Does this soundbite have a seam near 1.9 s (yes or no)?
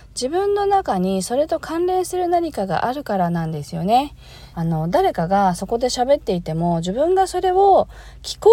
no